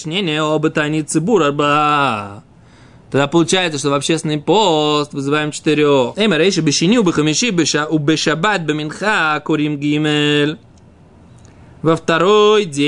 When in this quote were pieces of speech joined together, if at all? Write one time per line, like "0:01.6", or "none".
0:06.1